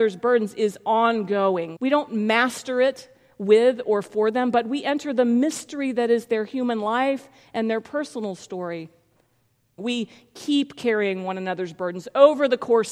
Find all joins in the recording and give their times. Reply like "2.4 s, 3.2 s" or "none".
1.8 s, 9.8 s